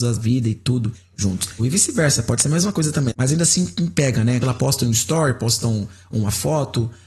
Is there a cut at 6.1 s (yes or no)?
no